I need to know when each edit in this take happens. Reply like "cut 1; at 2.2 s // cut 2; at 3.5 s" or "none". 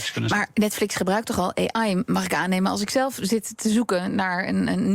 none